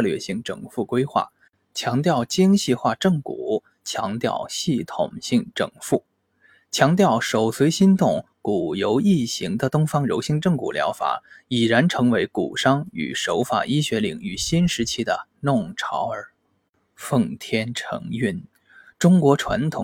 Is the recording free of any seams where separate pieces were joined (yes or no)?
yes